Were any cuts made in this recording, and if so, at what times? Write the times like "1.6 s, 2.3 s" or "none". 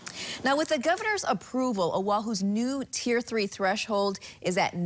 none

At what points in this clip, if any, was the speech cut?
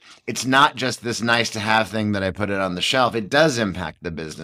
none

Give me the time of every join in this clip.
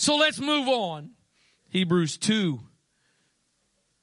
1.6 s

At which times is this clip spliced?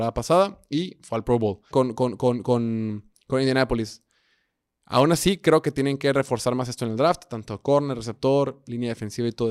1.7 s

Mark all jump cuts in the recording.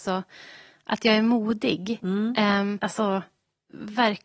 2.8 s

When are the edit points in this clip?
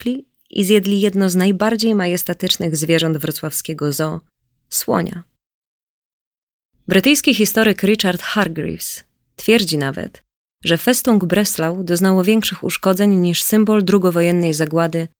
4.3 s

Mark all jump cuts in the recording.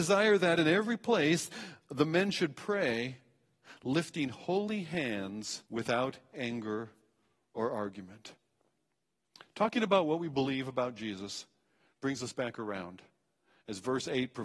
5.7 s

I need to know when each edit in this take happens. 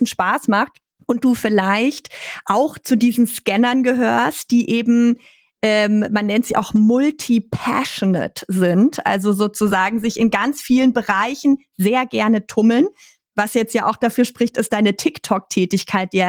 none

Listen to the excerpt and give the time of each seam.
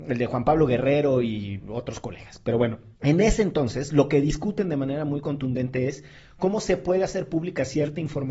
3.0 s

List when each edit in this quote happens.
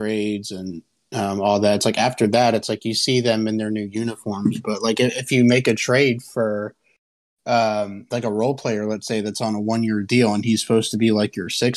none

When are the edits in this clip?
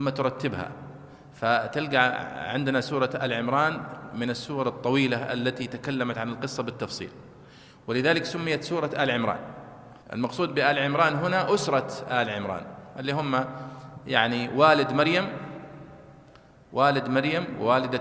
10.0 s

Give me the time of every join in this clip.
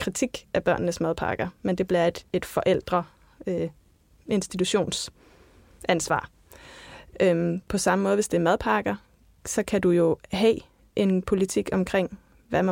7.1 s

